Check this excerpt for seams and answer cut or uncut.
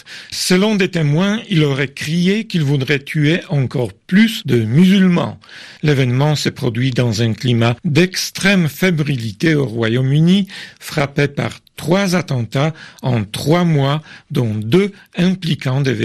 cut